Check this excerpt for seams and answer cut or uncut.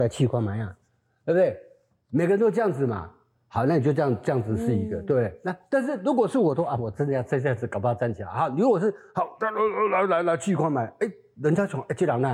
uncut